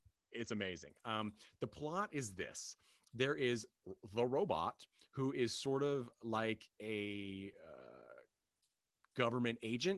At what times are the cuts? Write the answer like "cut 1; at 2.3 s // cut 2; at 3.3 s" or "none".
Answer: none